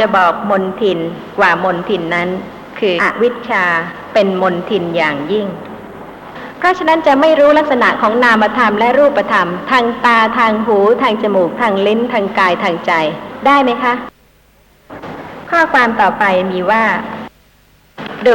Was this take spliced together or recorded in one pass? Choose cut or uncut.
cut